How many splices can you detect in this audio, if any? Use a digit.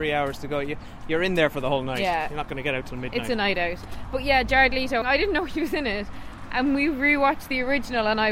1